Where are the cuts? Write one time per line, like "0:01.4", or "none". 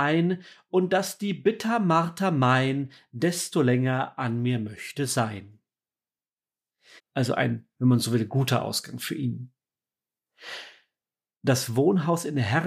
0:07.0